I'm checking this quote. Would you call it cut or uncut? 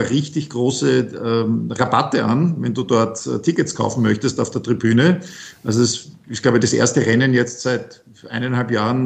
uncut